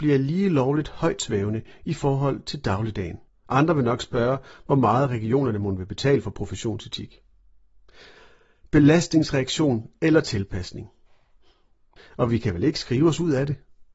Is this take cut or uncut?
cut